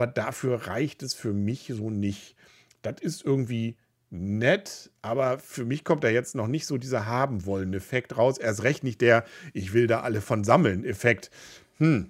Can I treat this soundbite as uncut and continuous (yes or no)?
yes